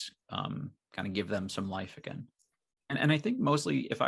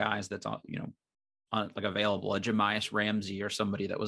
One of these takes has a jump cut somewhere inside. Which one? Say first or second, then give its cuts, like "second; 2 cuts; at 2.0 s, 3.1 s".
first; 1 cut; at 2.8 s